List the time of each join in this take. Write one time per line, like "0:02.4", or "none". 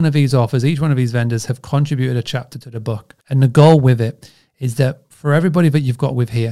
0:03.2